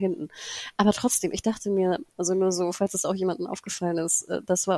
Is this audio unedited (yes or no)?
yes